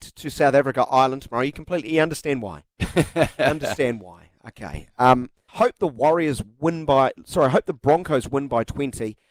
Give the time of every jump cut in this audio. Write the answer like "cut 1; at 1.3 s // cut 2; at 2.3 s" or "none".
cut 1; at 5.5 s